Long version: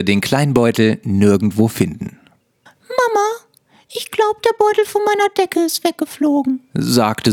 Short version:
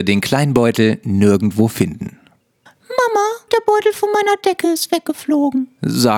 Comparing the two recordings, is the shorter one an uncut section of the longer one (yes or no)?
no